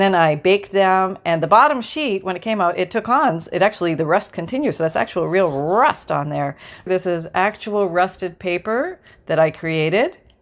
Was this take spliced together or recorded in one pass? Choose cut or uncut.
cut